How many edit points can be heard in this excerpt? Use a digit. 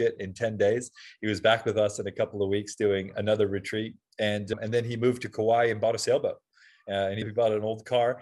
0